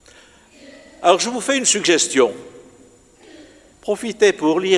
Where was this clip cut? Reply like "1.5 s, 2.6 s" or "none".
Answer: 3.7 s